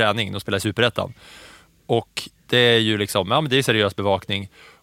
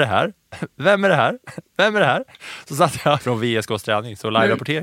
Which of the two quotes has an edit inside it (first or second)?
second